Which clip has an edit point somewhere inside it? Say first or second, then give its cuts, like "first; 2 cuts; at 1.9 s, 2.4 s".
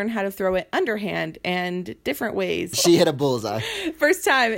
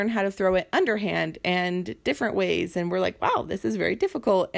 first; 1 cut; at 2.7 s